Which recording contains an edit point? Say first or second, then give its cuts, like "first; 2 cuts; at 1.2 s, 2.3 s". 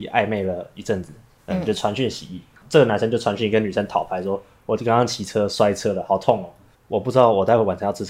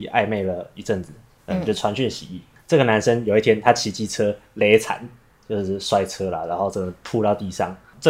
first; 2 cuts; at 2.6 s, 6.7 s